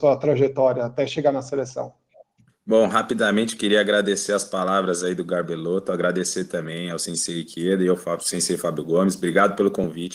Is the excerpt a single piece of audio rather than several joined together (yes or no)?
yes